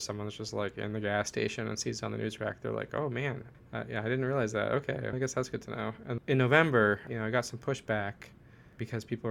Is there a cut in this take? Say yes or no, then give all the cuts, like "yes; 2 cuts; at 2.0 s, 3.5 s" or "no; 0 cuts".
yes; 2 cuts; at 5.1 s, 6.2 s